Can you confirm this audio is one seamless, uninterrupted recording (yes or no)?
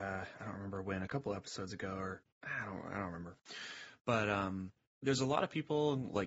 no